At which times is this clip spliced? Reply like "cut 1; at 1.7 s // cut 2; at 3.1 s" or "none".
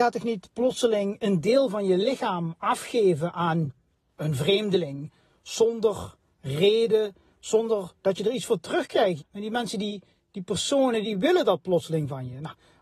cut 1; at 9.2 s